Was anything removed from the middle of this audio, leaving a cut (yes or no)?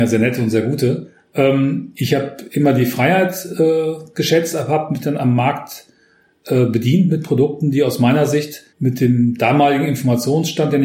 yes